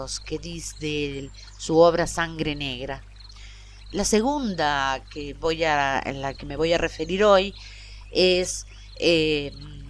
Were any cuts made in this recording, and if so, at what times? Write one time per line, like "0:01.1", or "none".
0:03.8
0:06.4